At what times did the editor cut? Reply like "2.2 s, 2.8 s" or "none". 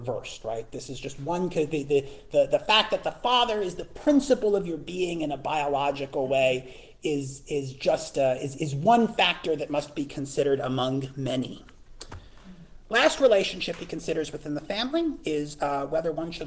none